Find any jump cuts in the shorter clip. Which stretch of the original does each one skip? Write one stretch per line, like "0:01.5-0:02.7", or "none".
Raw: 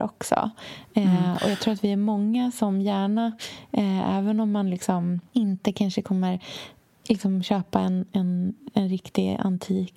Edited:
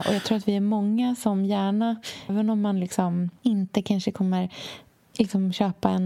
0:03.7-0:04.2